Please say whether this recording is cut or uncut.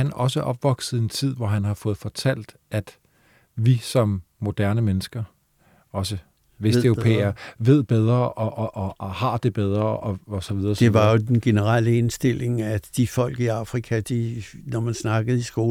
uncut